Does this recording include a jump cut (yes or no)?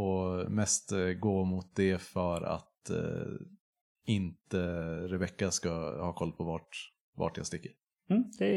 no